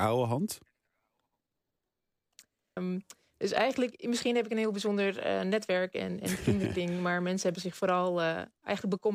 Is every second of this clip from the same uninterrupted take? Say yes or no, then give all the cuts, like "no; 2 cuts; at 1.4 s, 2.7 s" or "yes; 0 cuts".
no; 1 cut; at 2.8 s